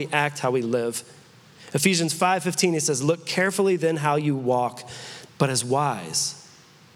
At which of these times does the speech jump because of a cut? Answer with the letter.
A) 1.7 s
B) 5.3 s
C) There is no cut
B